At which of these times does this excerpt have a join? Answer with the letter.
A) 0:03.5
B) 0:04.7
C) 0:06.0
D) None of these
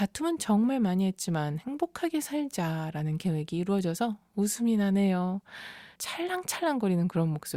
C